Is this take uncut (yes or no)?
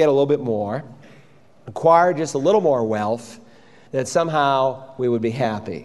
no